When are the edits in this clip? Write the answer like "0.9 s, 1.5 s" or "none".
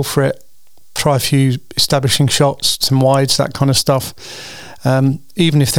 none